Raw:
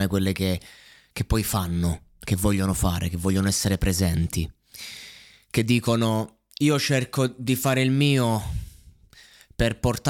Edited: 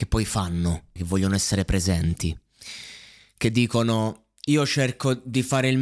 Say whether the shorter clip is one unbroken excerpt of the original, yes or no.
no